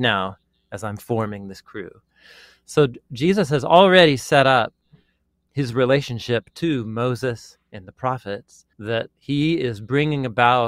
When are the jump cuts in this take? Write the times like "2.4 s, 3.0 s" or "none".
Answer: 8.7 s